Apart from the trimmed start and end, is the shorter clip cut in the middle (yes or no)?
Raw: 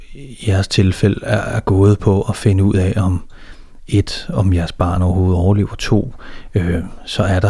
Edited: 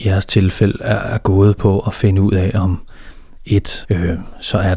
yes